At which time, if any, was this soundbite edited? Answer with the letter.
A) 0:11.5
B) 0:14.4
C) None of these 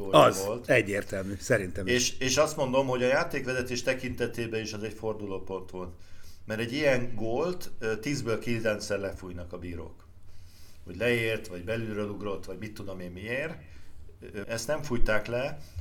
B